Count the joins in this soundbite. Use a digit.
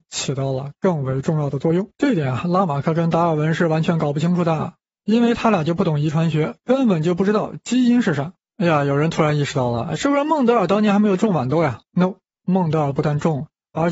1